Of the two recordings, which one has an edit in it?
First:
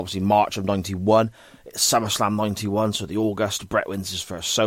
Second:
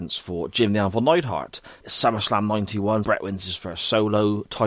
second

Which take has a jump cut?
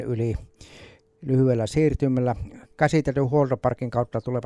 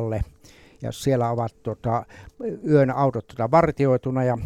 first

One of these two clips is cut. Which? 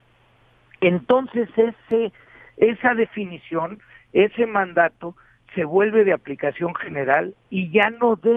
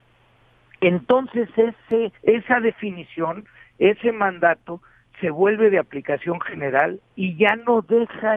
second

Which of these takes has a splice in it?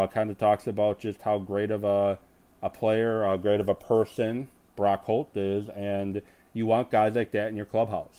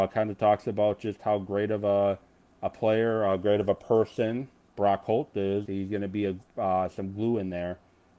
second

